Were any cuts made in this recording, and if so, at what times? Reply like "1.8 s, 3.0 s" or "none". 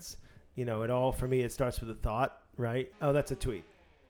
2.9 s